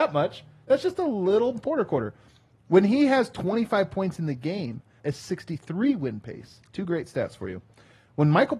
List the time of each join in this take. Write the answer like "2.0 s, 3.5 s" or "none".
5.0 s, 6.7 s

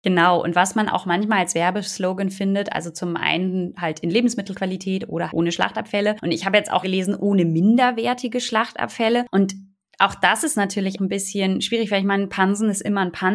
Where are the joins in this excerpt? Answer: 5.3 s, 6.8 s, 11.0 s

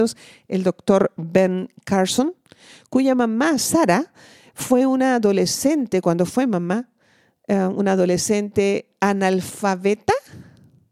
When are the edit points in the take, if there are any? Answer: none

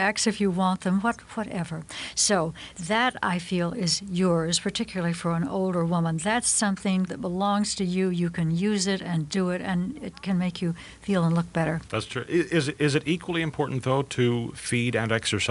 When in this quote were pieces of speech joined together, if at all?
7.1 s, 11.9 s

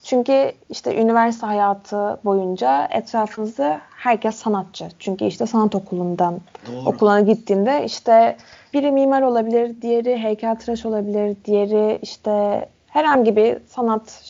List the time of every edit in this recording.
none

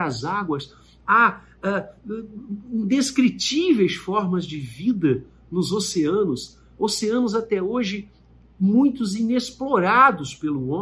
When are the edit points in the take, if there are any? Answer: none

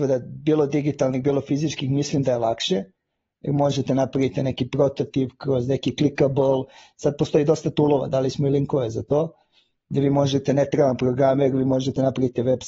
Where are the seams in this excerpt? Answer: none

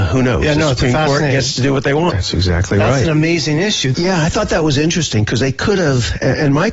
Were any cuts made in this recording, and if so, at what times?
2.1 s, 3.9 s

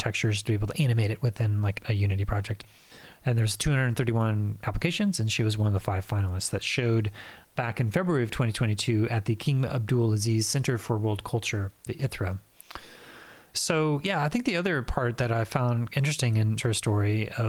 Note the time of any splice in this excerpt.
3.2 s, 13.5 s, 16.6 s

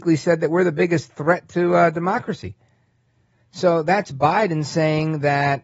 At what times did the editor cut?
none

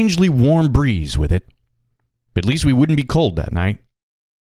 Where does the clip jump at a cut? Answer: none

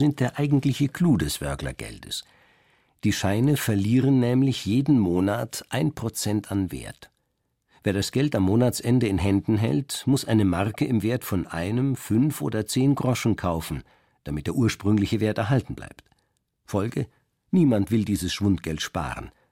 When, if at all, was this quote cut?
none

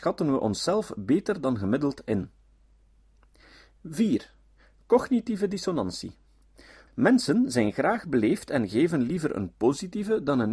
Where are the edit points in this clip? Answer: 6.9 s

